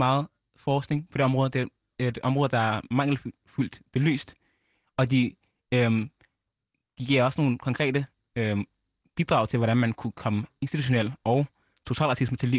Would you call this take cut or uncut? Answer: uncut